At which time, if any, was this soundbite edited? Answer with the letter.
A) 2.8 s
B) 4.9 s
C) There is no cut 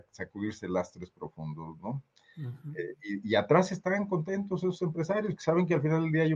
C